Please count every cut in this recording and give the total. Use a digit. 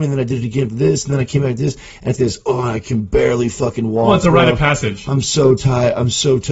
1